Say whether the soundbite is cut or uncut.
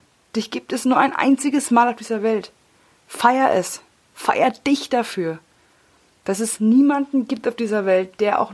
cut